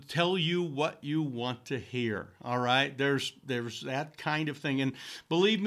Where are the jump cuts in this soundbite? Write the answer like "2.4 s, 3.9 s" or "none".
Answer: none